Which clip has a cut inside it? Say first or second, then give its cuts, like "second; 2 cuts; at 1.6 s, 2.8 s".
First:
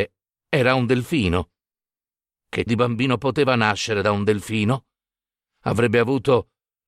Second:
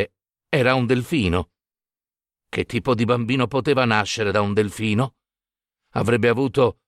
first; 1 cut; at 2.7 s